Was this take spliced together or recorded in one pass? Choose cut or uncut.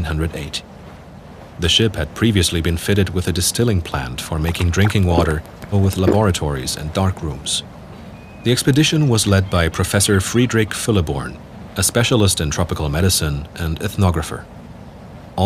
cut